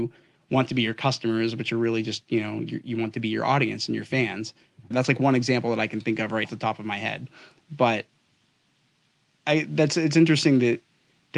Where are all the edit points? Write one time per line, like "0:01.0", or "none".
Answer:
0:04.9
0:06.4